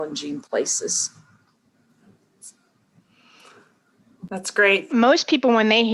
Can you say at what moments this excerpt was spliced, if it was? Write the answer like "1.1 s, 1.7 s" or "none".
4.9 s